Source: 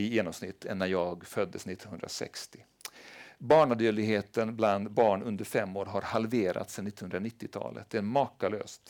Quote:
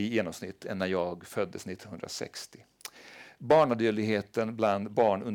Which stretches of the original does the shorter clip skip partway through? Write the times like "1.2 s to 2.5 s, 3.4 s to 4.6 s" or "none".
none